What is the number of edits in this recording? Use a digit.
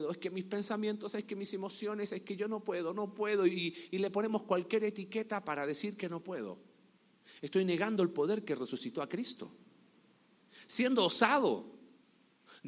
0